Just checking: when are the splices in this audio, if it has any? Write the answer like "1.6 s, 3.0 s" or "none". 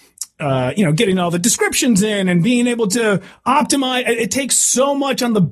none